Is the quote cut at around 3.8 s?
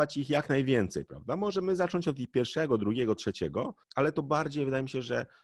yes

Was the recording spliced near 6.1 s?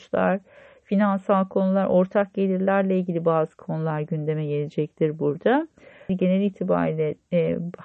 yes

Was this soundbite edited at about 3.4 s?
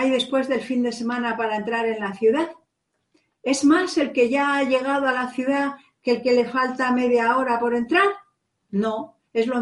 no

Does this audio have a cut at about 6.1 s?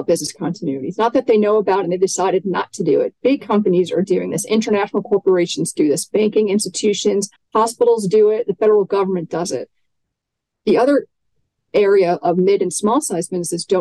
no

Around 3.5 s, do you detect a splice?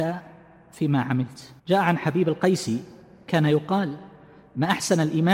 no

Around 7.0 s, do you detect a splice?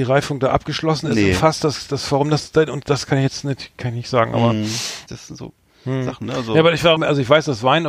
yes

